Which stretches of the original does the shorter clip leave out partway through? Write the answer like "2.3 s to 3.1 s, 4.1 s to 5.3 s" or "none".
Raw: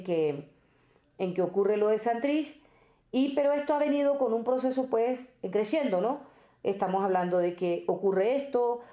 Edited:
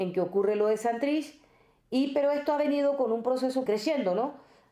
4.9 s to 5.5 s